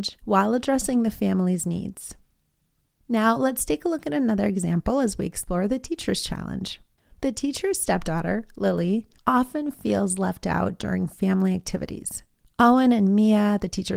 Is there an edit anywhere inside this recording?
no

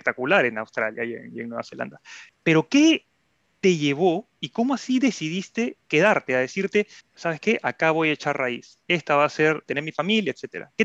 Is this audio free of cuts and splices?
no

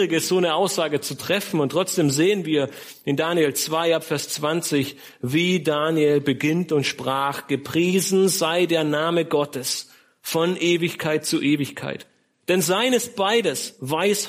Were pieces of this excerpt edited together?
no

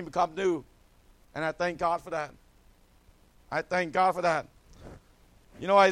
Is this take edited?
no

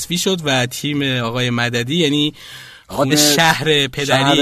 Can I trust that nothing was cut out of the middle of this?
no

